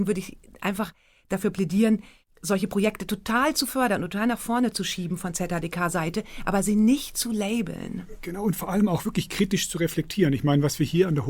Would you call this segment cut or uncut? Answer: uncut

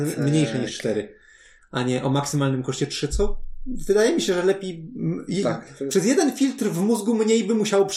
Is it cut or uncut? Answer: uncut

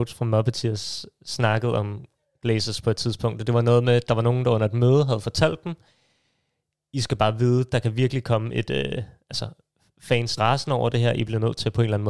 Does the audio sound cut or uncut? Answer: cut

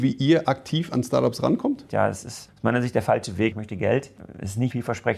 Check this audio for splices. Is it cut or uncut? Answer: cut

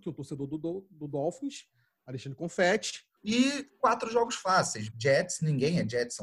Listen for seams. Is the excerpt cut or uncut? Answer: cut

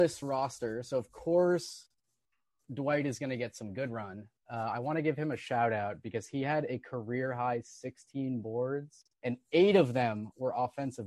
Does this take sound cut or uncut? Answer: cut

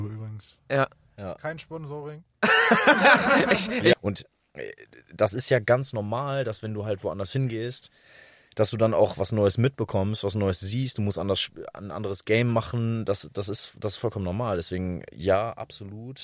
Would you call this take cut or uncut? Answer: cut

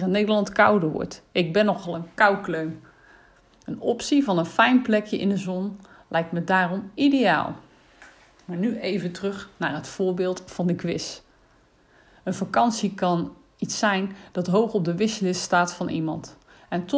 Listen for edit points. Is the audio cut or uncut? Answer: uncut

